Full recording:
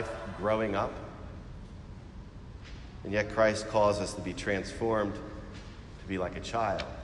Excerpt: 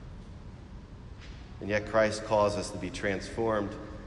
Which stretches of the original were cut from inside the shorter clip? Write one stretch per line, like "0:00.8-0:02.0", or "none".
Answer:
none